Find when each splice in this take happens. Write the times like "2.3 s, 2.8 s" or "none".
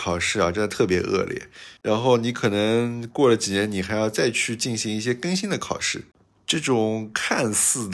1.8 s